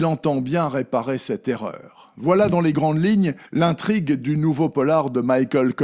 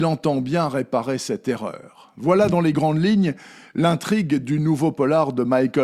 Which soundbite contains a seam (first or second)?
first